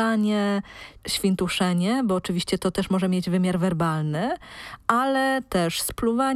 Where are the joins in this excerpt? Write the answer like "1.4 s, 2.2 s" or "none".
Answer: 1.0 s